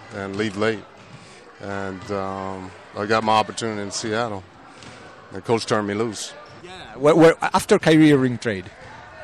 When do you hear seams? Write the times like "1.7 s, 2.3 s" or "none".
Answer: 6.6 s